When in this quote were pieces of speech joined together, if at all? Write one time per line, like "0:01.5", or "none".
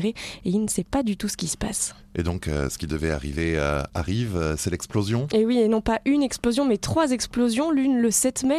none